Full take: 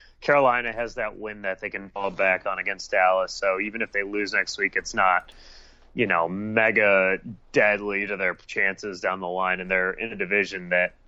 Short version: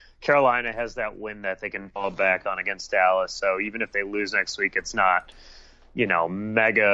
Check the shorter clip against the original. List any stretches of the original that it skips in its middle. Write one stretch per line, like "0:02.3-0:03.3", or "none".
none